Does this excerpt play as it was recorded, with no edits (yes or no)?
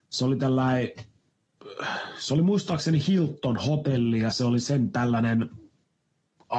yes